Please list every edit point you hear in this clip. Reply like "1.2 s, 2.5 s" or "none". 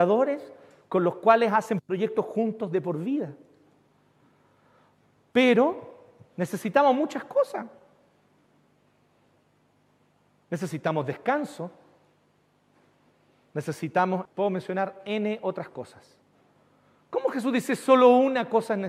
14.3 s